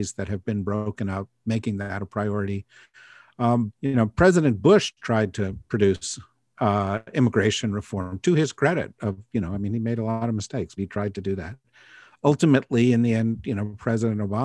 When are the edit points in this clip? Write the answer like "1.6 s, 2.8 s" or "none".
3.7 s, 10.8 s

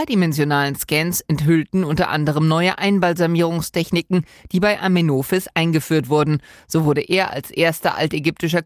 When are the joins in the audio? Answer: none

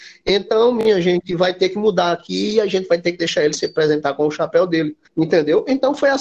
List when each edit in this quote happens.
5.1 s

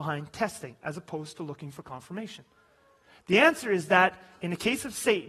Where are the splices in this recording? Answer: none

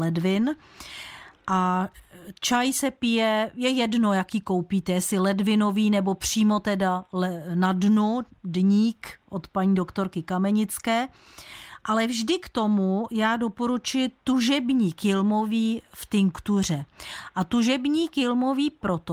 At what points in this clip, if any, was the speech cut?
none

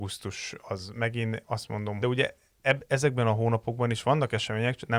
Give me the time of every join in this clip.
2.0 s

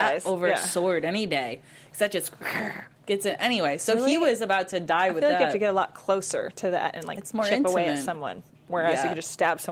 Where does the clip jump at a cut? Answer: none

